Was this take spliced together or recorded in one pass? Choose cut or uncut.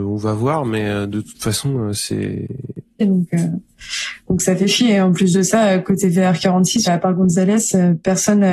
cut